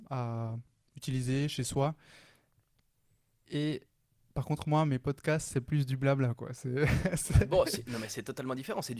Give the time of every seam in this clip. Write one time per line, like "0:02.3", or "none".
none